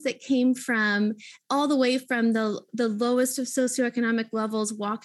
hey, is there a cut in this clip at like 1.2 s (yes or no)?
no